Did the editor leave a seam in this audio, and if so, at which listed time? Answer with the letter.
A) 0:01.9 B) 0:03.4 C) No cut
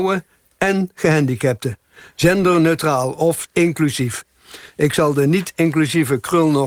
B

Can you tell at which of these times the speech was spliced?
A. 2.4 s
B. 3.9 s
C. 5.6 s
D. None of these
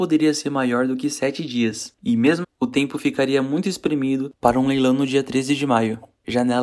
A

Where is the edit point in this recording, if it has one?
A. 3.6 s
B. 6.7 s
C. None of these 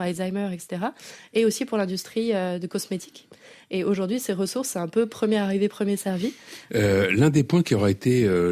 B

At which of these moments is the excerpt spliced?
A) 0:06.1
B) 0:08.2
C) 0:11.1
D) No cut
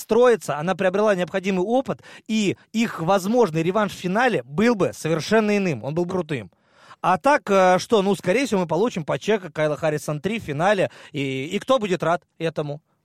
A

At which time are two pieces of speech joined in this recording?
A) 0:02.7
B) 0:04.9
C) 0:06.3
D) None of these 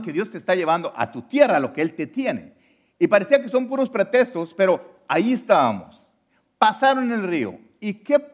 D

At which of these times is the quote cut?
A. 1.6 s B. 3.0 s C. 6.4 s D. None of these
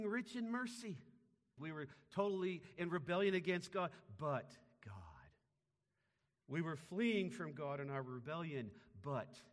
A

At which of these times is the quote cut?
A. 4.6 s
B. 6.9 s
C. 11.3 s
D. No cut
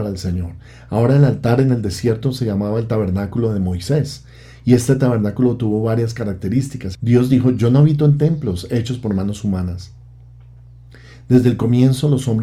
B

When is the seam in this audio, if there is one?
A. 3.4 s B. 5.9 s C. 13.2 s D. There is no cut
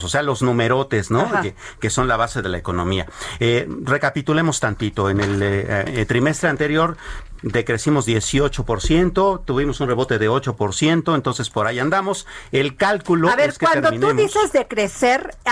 B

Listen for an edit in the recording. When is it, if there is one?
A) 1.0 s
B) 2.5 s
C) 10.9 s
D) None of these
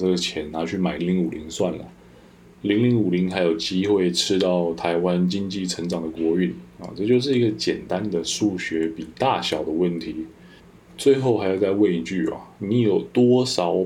A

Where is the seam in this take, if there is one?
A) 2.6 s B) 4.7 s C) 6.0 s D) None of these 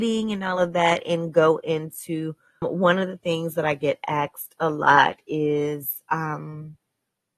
A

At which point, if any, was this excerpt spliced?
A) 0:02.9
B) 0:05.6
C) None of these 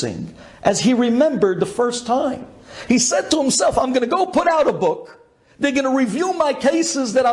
C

